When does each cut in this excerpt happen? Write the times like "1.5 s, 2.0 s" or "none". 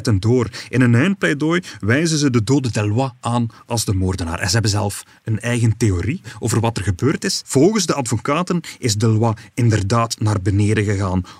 7.4 s